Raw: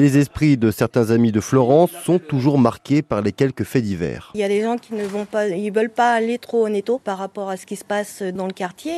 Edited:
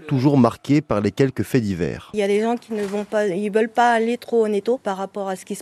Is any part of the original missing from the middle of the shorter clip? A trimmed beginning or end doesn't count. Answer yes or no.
no